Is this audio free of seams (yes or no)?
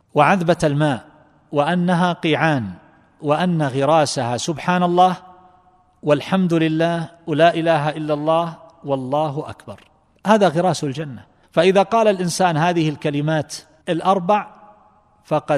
yes